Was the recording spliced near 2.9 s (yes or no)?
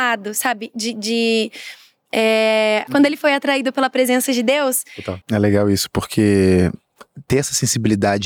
yes